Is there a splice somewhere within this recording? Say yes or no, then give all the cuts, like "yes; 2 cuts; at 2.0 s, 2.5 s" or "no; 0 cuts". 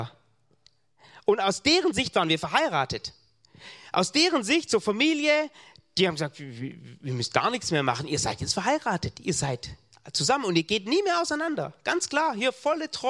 no; 0 cuts